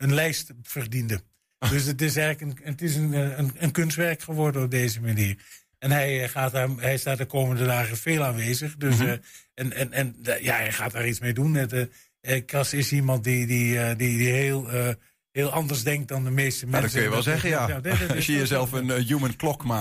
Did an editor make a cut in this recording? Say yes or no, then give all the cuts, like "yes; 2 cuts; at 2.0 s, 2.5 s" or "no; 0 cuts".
no; 0 cuts